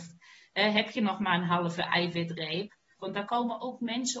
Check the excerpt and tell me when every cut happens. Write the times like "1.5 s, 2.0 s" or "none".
3.0 s